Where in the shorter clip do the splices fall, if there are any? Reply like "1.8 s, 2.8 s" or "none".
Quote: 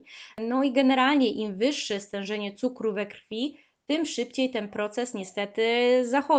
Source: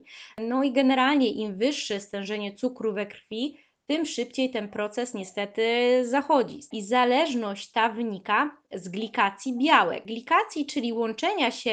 none